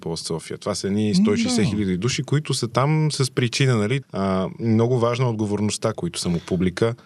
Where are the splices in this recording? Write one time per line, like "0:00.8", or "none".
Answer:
0:04.0
0:05.9